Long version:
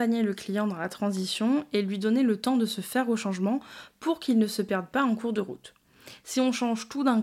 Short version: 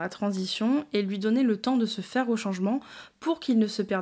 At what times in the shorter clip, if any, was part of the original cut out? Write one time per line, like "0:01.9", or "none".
none